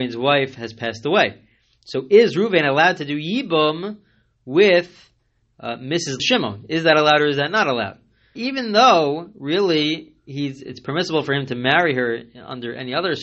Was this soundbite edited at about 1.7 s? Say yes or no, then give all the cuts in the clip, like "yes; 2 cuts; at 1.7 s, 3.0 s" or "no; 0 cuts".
no; 2 cuts; at 6.2 s, 8.4 s